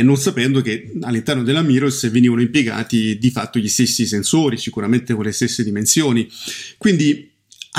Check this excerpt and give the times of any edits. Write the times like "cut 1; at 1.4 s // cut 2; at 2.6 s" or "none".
none